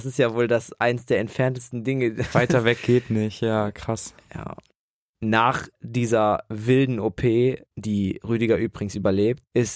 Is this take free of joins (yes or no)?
yes